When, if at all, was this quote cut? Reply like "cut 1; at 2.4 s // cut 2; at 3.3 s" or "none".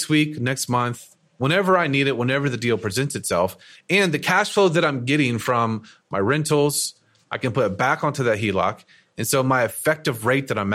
cut 1; at 3.7 s